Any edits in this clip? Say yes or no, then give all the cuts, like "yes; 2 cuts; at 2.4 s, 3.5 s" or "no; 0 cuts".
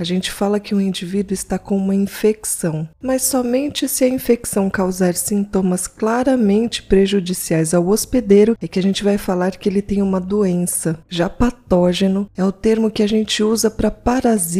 yes; 1 cut; at 11.0 s